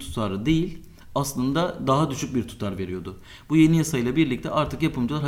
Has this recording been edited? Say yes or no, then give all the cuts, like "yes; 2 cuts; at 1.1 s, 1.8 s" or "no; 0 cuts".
no; 0 cuts